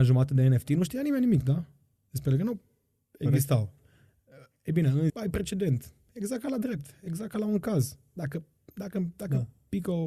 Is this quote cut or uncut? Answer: cut